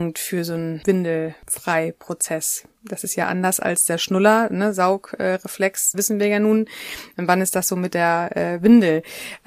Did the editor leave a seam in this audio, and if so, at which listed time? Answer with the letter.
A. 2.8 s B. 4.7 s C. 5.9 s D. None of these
C